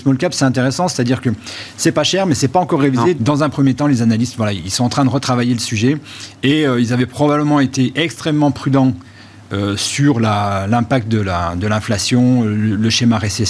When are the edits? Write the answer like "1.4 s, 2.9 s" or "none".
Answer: 3.1 s